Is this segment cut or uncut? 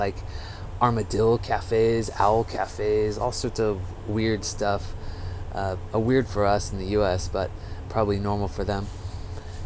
uncut